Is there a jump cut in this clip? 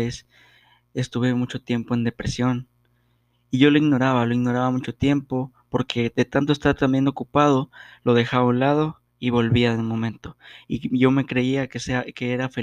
no; 0 cuts

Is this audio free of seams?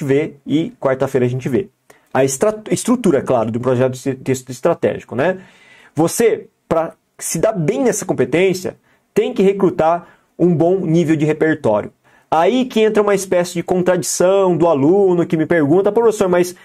yes; 0 cuts

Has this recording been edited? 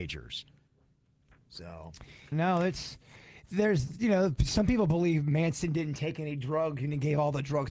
yes; 1 cut; at 2.3 s

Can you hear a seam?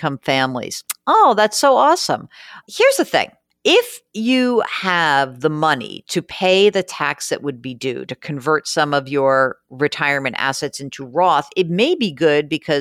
no; 0 cuts

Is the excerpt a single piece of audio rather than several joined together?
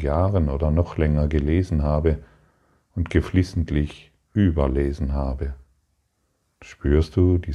no; 1 cut; at 6.4 s

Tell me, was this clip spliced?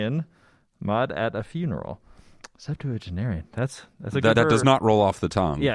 yes; 1 cut; at 4.4 s

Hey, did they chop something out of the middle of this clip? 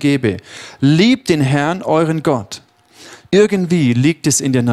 yes; 1 cut; at 3.3 s

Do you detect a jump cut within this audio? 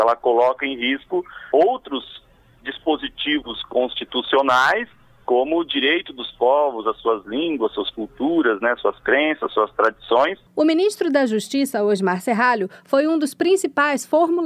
no; 0 cuts

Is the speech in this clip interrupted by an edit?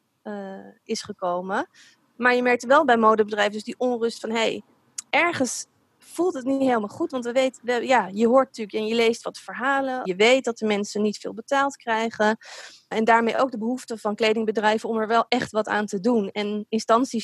yes; 2 cuts; at 10.0 s, 12.9 s

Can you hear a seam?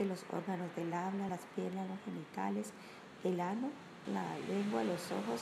yes; 2 cuts; at 1.3 s, 4.0 s

